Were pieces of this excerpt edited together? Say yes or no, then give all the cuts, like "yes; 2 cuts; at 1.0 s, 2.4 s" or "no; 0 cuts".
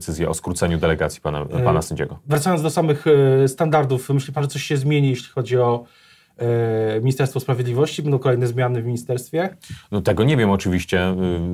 no; 0 cuts